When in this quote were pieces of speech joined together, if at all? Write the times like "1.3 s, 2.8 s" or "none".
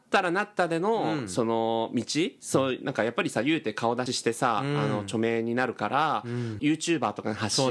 4.1 s, 6.6 s